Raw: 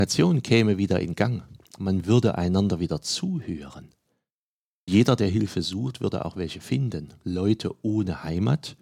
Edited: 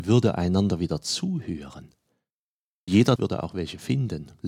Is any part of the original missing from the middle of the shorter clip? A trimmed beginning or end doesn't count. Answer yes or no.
yes